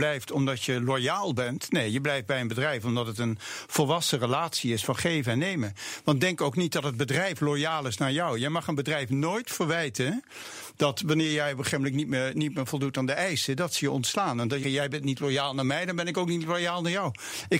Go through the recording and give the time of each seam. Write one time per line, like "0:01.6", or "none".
0:14.6